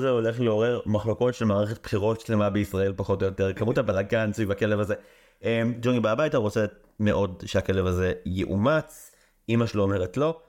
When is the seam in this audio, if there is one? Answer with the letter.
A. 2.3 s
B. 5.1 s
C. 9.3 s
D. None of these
D